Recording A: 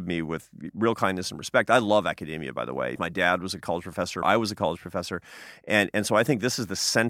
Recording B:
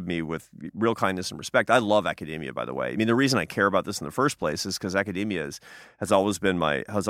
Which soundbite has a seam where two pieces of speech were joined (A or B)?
A